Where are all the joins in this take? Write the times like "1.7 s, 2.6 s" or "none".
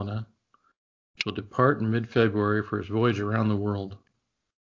none

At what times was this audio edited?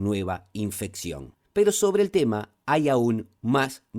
none

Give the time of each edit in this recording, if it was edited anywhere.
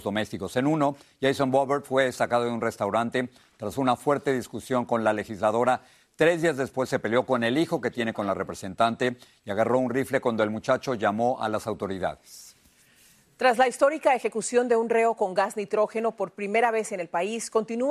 none

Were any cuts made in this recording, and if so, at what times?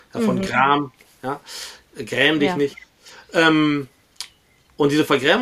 none

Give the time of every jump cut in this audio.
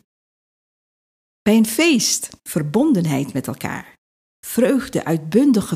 2.4 s

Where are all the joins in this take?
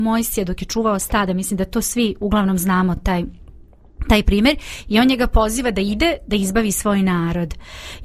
none

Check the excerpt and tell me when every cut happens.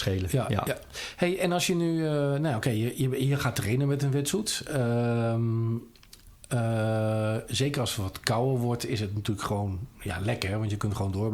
none

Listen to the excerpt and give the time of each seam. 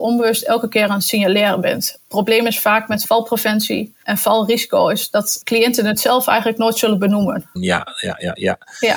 7.6 s

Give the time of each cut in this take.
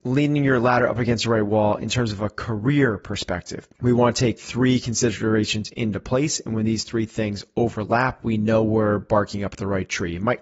3.7 s

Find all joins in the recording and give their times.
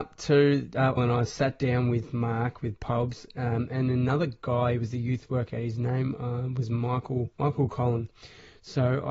1.0 s, 7.3 s

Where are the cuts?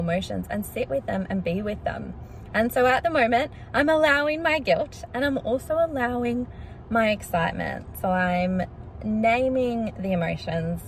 none

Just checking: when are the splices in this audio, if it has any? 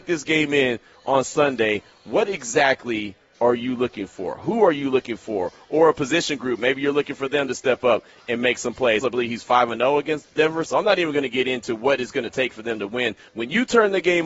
9.0 s, 10.6 s, 13.3 s

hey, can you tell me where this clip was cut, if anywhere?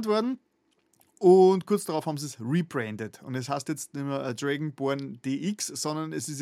none

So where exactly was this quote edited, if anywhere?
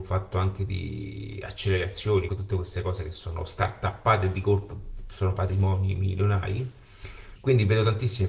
2.3 s, 7.4 s

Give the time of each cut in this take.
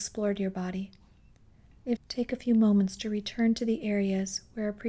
2.0 s

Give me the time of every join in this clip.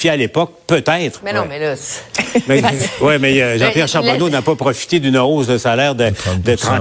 1.2 s

